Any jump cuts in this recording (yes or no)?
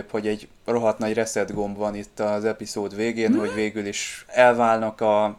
no